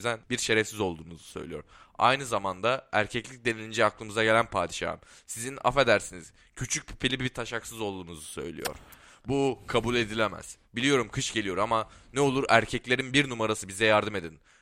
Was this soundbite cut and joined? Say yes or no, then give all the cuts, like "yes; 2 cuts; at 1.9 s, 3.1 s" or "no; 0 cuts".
no; 0 cuts